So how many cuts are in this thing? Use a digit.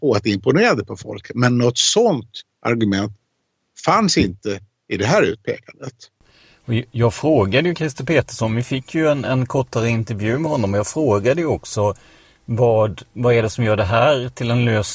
0